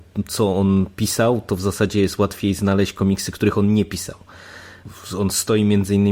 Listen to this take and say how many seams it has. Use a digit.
0